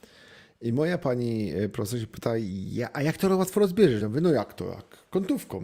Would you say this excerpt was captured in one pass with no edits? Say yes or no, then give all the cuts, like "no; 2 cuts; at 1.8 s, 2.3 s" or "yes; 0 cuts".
yes; 0 cuts